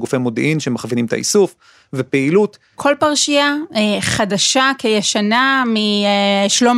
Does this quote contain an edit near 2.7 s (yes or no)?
yes